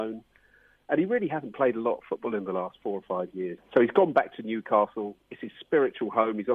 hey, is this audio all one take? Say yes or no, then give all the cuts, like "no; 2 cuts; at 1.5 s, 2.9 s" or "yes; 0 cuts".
no; 1 cut; at 3.6 s